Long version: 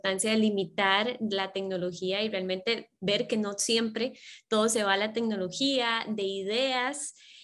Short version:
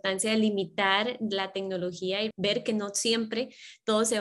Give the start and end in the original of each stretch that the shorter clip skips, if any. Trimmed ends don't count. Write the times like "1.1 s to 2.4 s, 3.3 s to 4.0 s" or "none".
2.3 s to 2.9 s